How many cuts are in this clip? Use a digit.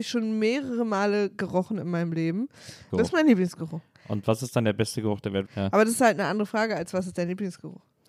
2